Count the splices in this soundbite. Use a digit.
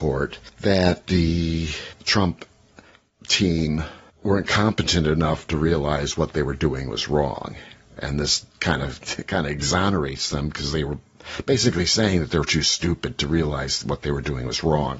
0